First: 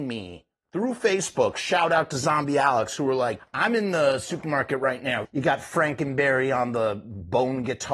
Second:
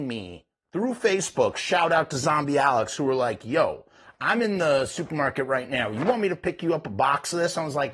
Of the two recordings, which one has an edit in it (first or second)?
first